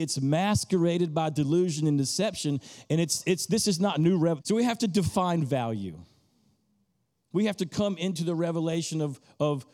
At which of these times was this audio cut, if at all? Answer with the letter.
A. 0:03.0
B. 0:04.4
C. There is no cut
B